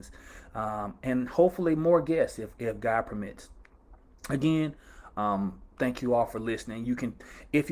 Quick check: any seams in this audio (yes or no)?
no